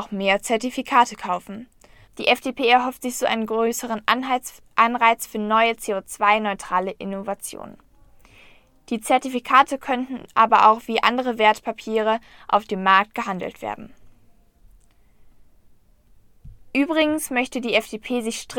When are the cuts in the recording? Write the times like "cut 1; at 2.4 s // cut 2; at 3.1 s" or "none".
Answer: cut 1; at 2.1 s